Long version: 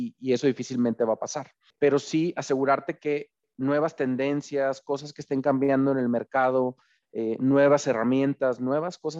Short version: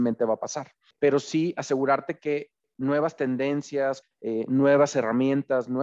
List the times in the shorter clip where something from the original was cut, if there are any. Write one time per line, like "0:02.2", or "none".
0:04.0